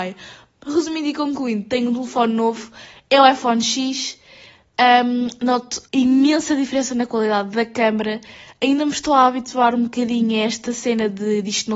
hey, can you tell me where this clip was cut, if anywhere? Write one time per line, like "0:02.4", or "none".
0:05.8